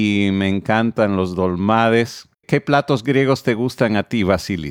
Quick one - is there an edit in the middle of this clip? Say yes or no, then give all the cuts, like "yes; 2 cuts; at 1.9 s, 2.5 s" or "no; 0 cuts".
yes; 1 cut; at 2.3 s